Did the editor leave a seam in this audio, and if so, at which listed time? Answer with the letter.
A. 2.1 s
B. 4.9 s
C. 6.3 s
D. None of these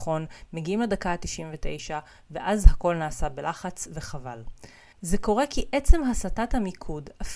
B